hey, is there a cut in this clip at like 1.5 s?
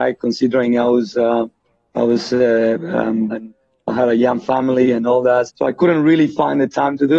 no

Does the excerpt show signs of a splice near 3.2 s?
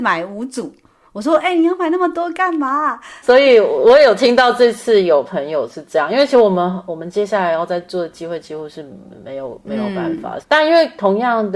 yes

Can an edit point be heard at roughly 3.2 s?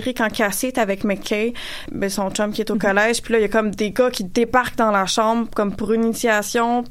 no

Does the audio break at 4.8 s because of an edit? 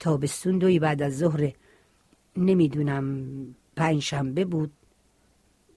no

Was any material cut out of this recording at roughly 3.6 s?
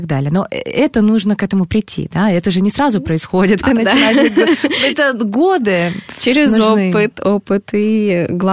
yes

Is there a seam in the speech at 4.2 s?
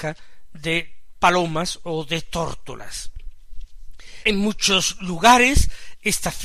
yes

